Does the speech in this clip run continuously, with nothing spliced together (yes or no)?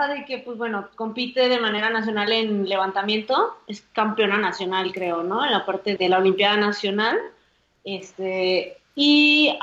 no